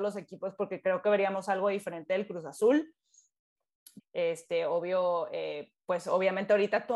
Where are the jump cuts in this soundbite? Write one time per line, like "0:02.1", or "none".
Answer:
0:04.0